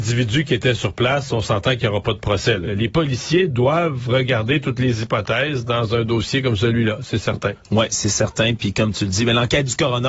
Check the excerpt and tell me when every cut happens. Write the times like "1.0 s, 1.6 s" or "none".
2.6 s